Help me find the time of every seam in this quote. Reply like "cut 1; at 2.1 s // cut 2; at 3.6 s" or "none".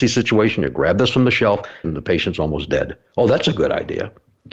cut 1; at 1.8 s

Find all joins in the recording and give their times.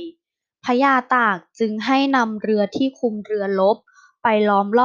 none

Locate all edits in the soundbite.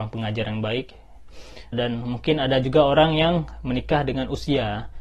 cut 1; at 1.7 s

